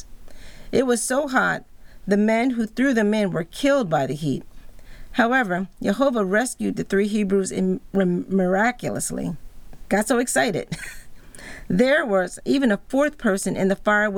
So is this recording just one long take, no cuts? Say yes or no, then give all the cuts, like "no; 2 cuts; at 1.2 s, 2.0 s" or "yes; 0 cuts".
yes; 0 cuts